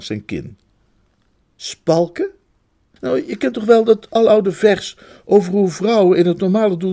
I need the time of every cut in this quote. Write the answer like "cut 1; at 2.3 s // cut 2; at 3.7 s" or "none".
cut 1; at 3.0 s